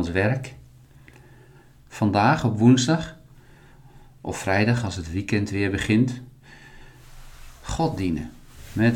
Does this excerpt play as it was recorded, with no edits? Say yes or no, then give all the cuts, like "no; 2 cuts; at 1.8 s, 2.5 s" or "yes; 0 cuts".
yes; 0 cuts